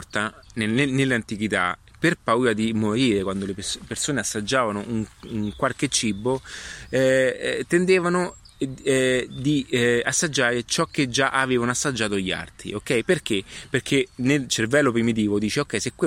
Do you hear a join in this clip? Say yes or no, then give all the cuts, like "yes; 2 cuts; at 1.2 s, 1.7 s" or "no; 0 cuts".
no; 0 cuts